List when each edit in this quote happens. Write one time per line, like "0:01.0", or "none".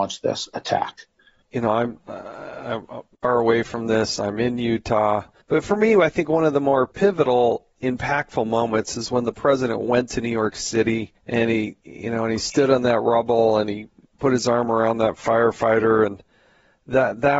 0:05.4
0:11.2